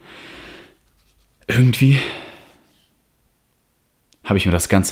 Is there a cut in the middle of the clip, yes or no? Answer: no